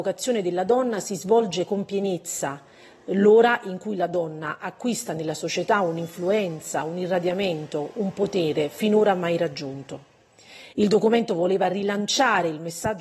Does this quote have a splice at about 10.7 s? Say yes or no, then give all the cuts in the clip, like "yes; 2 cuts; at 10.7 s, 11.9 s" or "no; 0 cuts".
yes; 1 cut; at 10.7 s